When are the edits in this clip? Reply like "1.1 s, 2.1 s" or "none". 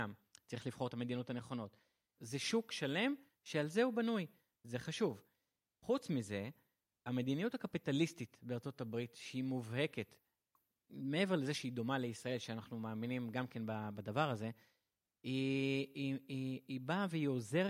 2.1 s

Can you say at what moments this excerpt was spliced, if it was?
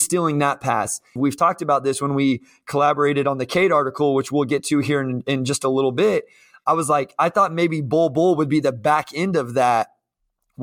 1.2 s

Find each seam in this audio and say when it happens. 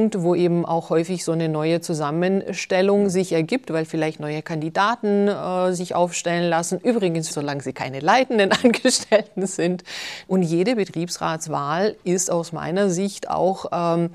7.3 s, 10.3 s

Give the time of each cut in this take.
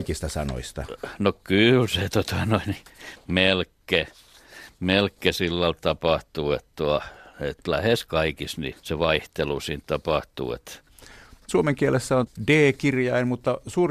8.7 s

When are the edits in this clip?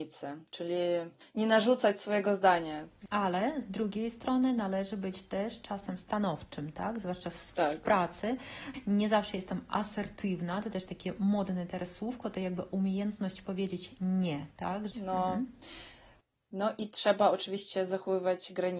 14.9 s

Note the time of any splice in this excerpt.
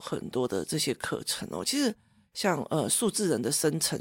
none

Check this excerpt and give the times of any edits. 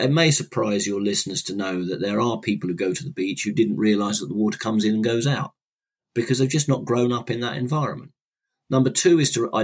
none

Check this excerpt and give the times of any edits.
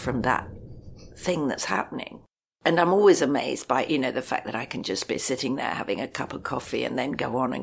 none

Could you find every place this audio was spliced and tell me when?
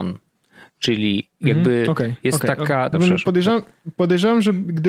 2.9 s

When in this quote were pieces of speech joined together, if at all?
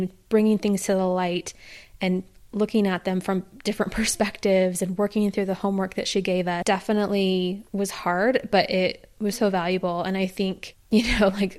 7.7 s, 9.3 s

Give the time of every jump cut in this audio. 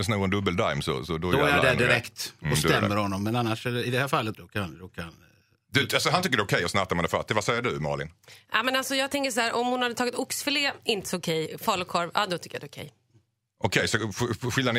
4.3 s

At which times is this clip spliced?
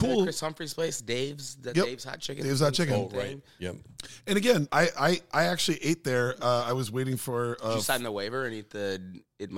4.7 s

